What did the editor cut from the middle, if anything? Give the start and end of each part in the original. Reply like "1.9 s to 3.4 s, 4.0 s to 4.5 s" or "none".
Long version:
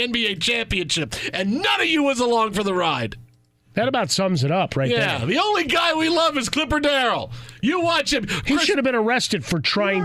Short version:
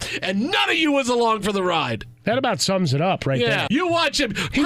3.3 s to 3.7 s, 5.2 s to 7.6 s